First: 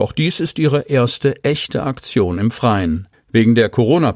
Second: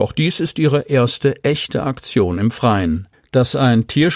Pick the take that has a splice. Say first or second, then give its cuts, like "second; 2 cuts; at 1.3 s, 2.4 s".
second; 1 cut; at 3.2 s